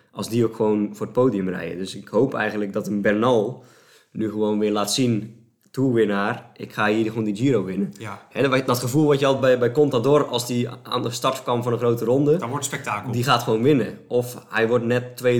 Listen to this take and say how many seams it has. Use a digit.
0